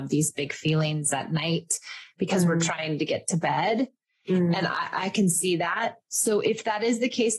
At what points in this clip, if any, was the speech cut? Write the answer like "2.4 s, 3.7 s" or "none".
none